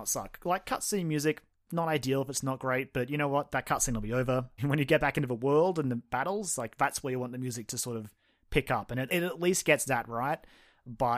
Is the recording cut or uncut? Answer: cut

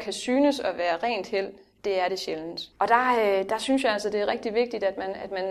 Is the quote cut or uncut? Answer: cut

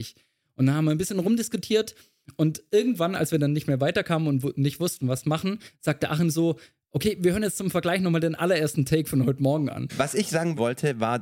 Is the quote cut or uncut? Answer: cut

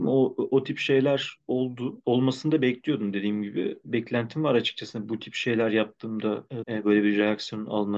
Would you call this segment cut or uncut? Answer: cut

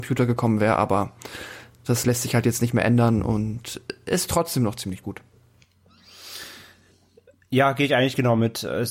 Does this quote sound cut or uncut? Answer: uncut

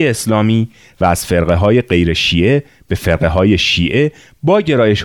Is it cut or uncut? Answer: uncut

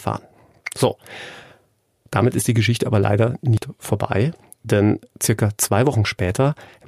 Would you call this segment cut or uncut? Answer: uncut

